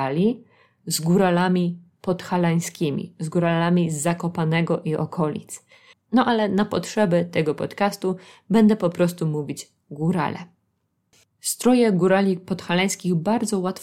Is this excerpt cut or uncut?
cut